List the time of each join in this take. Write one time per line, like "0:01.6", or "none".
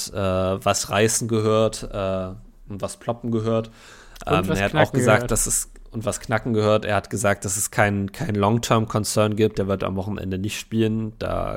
0:09.5